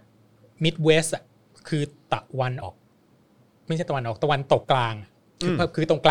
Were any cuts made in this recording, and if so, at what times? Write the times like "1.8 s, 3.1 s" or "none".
2.6 s, 4.6 s